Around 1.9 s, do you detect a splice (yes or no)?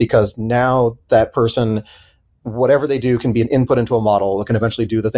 no